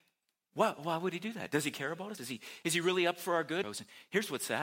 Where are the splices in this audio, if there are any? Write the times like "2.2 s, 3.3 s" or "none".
2.2 s, 3.6 s